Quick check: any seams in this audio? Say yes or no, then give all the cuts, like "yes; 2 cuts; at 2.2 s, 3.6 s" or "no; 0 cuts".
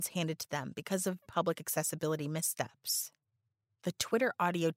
yes; 1 cut; at 1.2 s